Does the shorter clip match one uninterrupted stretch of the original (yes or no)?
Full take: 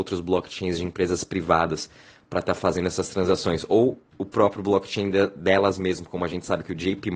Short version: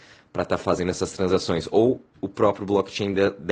yes